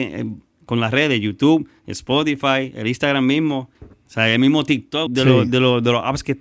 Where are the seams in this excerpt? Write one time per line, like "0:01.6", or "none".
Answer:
0:03.7
0:05.1